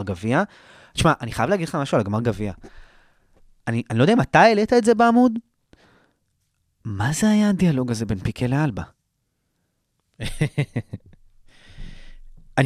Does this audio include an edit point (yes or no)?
no